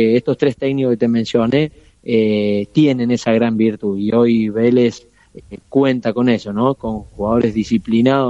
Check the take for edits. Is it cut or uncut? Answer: uncut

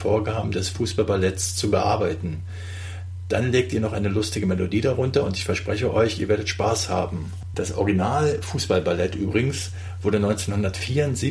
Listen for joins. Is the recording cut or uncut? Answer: cut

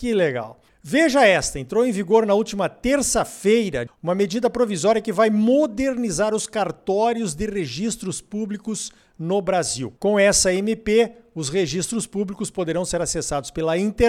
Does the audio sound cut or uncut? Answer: cut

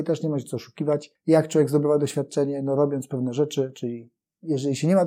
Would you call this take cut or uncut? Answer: uncut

